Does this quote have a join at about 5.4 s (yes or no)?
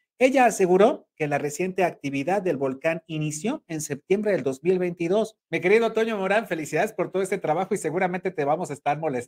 yes